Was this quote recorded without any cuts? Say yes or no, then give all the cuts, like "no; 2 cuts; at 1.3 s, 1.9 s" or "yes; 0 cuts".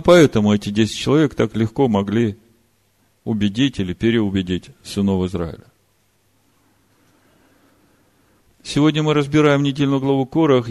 yes; 0 cuts